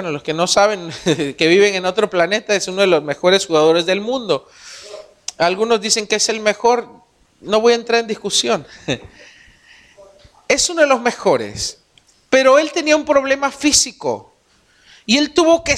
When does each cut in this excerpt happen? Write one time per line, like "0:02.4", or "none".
none